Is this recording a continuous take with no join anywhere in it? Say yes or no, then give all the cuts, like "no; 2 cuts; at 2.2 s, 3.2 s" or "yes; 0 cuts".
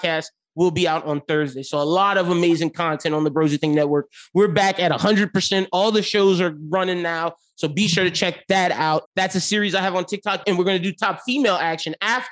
no; 2 cuts; at 9.1 s, 10.4 s